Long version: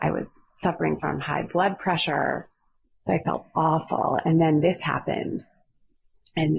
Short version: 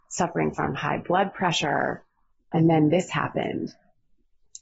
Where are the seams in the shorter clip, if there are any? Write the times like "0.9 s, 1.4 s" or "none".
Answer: 2.5 s